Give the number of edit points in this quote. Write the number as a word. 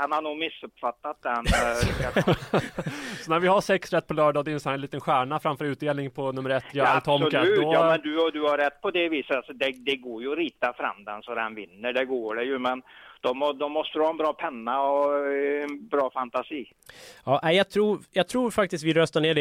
zero